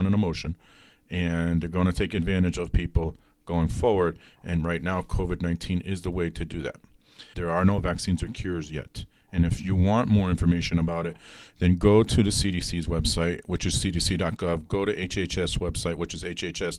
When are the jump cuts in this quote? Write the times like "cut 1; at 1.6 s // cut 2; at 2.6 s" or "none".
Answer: cut 1; at 7.3 s